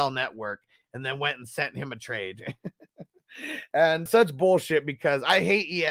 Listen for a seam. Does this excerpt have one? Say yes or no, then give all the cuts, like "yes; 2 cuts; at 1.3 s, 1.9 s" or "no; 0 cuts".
yes; 1 cut; at 4.1 s